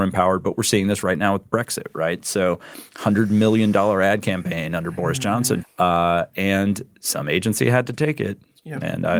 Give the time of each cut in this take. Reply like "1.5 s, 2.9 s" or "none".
5.6 s